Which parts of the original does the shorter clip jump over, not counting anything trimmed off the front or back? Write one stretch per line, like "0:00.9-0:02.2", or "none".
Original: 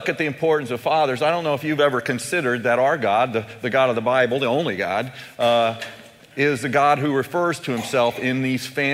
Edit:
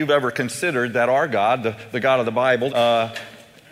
0:04.4-0:05.3